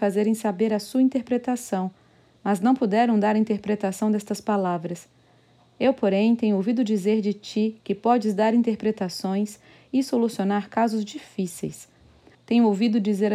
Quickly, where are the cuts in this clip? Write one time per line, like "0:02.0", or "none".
0:12.3